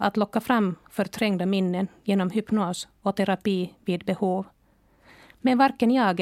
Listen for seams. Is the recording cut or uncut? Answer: uncut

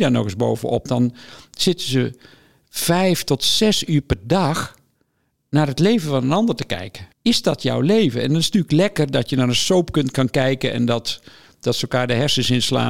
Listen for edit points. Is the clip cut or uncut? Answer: cut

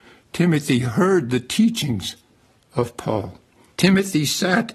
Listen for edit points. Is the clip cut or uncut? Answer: cut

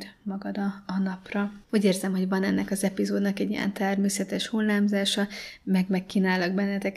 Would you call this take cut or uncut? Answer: cut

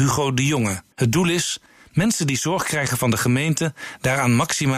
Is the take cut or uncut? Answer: cut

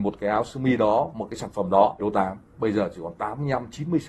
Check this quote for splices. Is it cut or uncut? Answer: cut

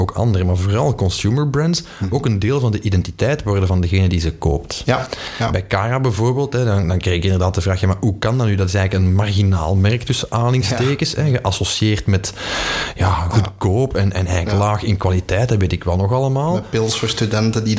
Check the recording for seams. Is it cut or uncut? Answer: uncut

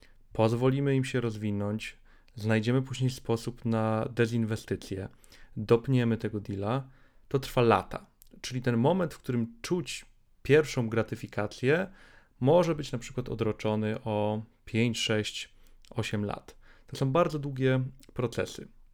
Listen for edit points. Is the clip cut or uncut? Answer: uncut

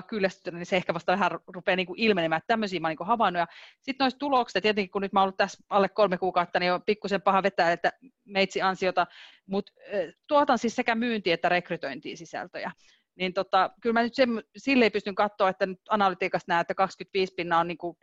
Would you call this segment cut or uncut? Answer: uncut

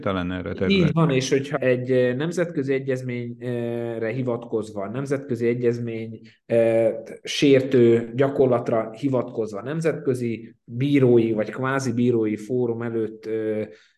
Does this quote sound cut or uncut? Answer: cut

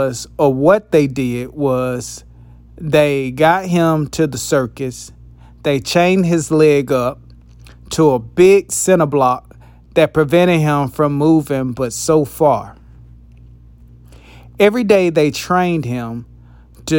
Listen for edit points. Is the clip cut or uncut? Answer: uncut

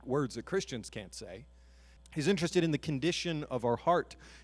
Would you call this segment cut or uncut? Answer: cut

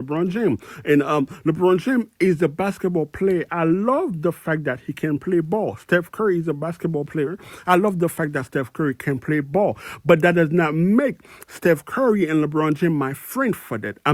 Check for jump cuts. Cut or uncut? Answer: uncut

